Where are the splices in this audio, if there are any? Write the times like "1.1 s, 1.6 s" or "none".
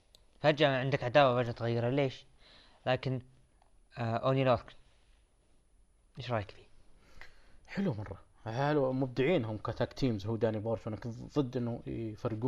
none